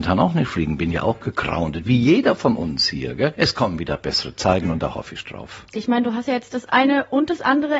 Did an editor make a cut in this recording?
yes; 2 cuts; at 3.3 s, 5.7 s

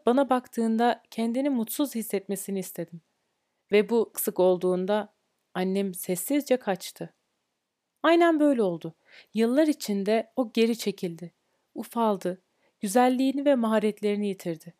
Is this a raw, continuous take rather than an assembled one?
no; 1 cut; at 4.1 s

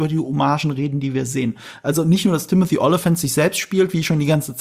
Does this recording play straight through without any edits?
yes; 0 cuts

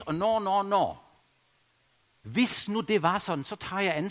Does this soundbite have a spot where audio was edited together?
yes; 1 cut; at 2.2 s

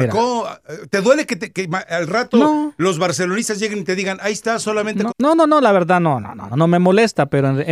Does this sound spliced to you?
yes; 2 cuts; at 5.1 s, 6.5 s

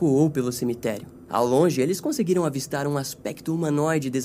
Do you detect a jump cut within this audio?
yes; 1 cut; at 1.3 s

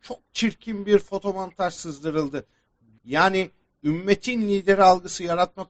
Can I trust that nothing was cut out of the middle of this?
no; 1 cut; at 3.0 s

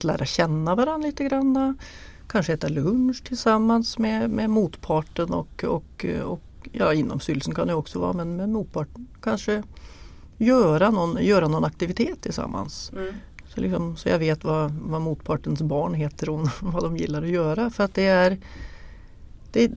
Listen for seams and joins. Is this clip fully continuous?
yes; 0 cuts

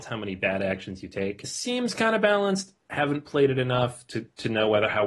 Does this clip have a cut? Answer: no; 0 cuts

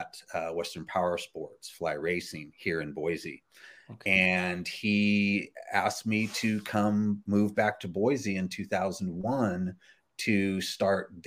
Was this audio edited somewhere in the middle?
no; 0 cuts

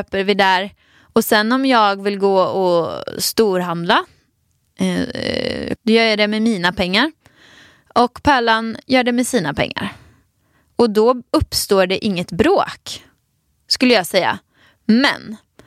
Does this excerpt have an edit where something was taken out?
yes; 1 cut; at 5.8 s

